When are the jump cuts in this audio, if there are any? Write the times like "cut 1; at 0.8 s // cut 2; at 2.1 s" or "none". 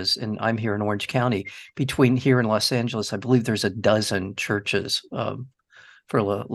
none